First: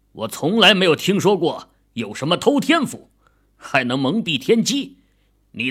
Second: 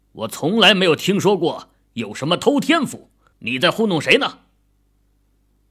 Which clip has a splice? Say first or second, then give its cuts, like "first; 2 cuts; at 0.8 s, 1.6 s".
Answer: second; 1 cut; at 3.3 s